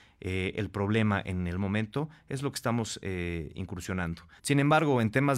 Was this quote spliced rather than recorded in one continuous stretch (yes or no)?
yes